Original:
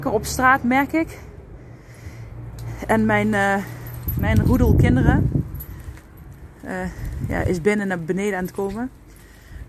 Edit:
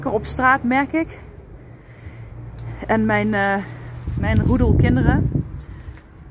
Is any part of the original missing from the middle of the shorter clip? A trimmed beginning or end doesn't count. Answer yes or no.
no